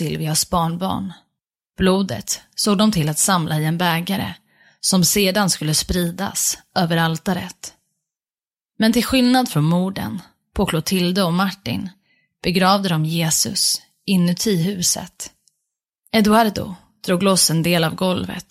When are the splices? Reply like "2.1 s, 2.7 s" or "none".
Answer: 1.7 s